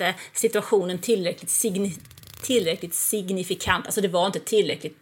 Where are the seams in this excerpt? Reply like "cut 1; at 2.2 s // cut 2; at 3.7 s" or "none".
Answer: none